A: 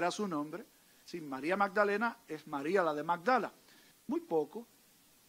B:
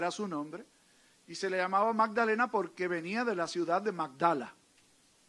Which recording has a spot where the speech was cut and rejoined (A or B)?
A